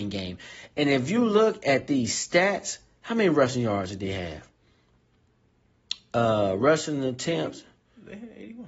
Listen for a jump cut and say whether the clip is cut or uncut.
uncut